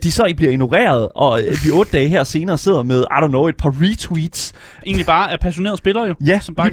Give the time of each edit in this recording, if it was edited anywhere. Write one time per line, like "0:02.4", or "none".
0:04.8